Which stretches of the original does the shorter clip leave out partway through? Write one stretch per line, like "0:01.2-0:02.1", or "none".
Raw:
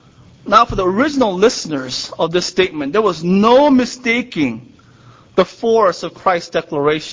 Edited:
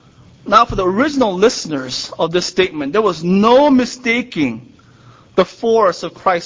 none